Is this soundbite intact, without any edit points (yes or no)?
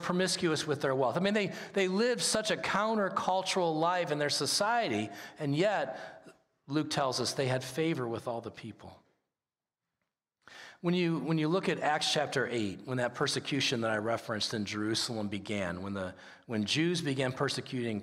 yes